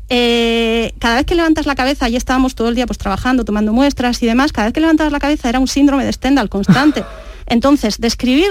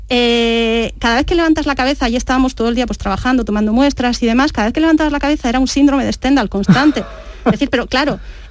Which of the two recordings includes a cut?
first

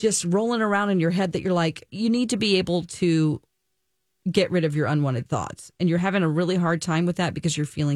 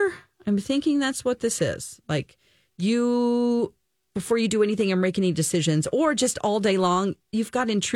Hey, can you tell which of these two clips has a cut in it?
first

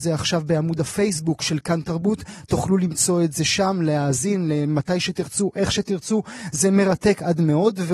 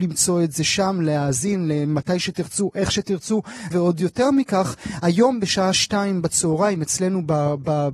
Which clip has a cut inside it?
second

